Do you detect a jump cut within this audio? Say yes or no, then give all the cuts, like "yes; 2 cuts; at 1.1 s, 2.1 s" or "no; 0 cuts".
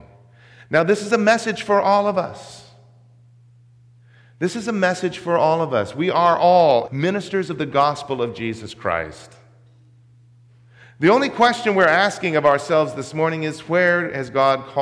yes; 1 cut; at 6.9 s